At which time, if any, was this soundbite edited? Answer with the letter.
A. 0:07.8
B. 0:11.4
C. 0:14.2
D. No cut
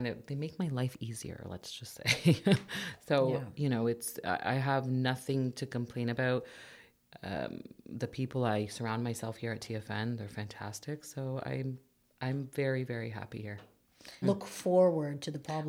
C